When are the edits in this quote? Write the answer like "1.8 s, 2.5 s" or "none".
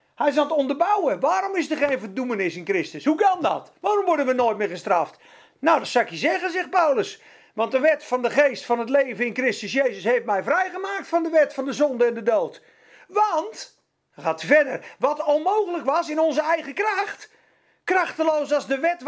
none